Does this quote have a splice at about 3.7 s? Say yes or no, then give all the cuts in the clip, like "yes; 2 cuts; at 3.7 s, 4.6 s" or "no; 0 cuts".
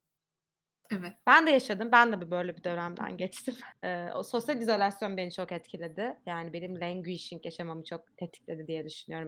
yes; 1 cut; at 3.7 s